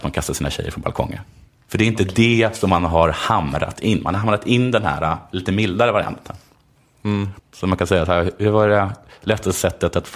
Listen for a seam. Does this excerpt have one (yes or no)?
yes